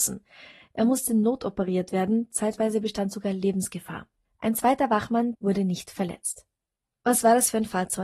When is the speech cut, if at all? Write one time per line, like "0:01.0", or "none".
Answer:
0:05.3